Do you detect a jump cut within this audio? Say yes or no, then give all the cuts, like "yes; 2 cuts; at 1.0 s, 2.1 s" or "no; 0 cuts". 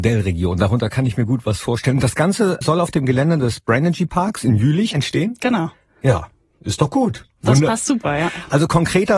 yes; 2 cuts; at 2.6 s, 4.9 s